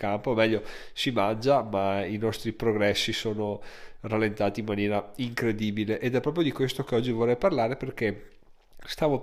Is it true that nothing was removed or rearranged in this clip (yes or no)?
yes